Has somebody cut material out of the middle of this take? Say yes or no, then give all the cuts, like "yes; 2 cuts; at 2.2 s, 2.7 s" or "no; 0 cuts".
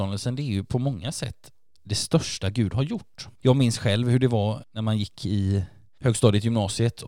yes; 1 cut; at 3.4 s